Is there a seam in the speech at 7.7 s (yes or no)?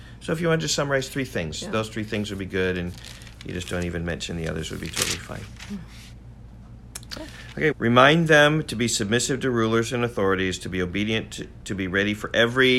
yes